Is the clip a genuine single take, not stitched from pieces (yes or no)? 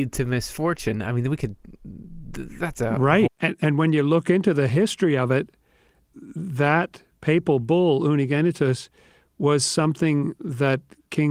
no